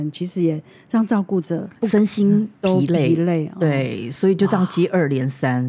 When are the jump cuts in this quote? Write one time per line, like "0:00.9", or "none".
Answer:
0:01.8